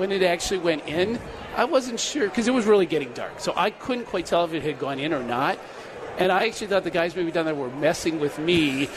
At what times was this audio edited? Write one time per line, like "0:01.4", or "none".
none